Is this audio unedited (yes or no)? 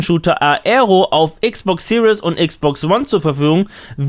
yes